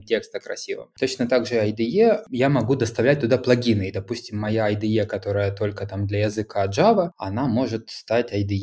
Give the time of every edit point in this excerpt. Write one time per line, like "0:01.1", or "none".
none

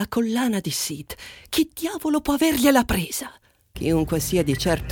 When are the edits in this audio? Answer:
0:03.7

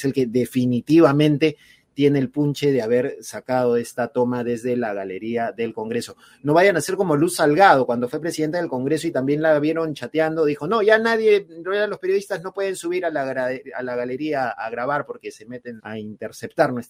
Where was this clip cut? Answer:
0:14.5
0:15.8

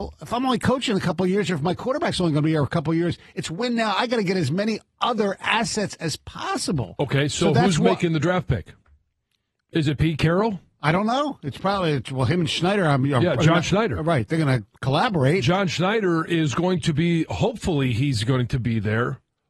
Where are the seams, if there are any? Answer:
none

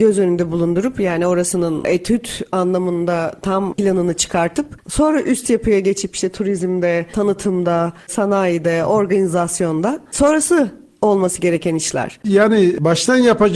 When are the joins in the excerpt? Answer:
none

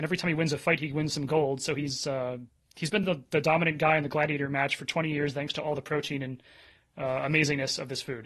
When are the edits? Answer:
none

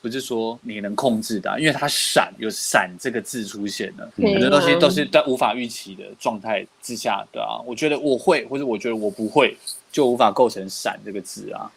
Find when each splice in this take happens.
none

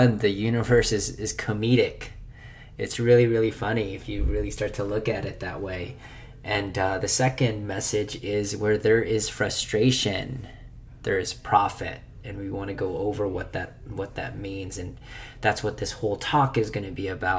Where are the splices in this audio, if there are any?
none

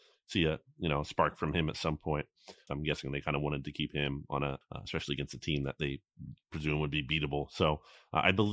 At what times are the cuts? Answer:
0:02.7
0:04.6

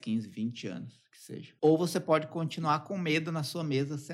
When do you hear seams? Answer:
0:01.6

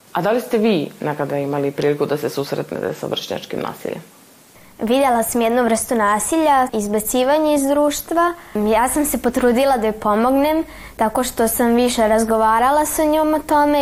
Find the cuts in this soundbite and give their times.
0:06.7

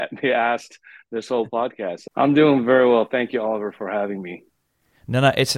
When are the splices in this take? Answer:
0:02.1

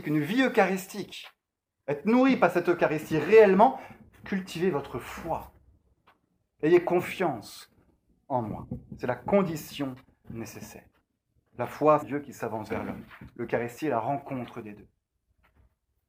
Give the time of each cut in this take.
0:10.2
0:12.0

